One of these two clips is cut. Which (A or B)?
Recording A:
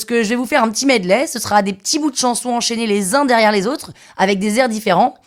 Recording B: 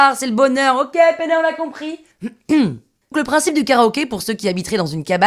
B